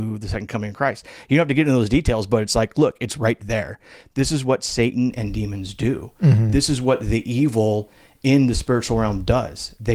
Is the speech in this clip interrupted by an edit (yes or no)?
no